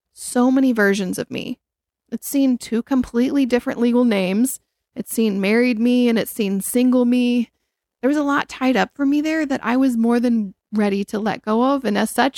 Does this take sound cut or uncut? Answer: uncut